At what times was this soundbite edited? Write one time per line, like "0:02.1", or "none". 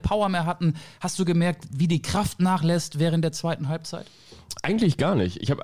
none